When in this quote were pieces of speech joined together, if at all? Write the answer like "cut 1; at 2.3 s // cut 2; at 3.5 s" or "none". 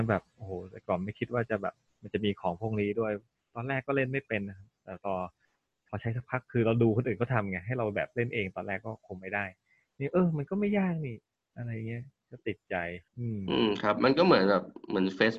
cut 1; at 13.1 s